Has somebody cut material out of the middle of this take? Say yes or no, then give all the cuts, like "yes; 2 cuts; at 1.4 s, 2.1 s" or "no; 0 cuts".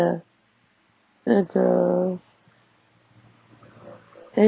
no; 0 cuts